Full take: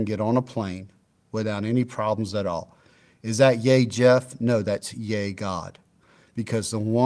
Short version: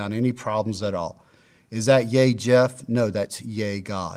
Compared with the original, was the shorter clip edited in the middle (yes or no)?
no